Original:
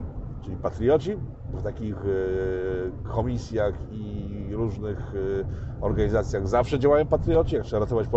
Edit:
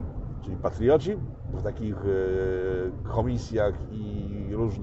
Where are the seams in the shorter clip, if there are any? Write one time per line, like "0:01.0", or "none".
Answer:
none